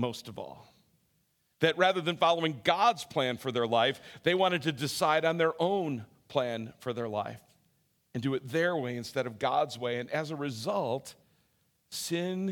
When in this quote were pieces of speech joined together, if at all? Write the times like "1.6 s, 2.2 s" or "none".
none